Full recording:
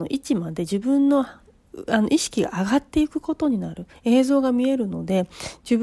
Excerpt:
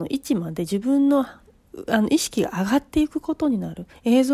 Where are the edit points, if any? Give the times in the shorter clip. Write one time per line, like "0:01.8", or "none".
none